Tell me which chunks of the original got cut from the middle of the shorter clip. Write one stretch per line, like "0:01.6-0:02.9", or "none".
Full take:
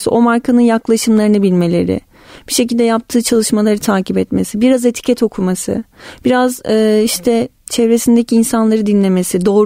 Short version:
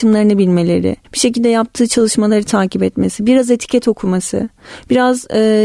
0:02.1-0:02.4